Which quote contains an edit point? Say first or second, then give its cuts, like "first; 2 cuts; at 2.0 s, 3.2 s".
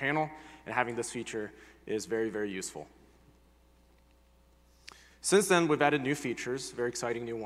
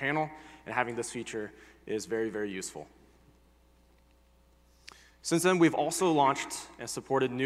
first; 1 cut; at 5.1 s